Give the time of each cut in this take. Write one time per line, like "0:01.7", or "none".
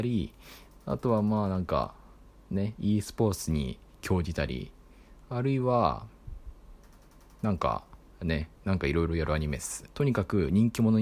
0:08.6
0:09.9